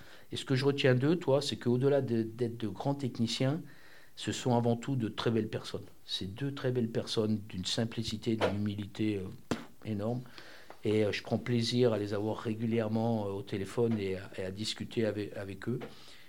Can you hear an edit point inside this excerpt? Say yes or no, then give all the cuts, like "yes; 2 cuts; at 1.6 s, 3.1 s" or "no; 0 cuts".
yes; 1 cut; at 8.4 s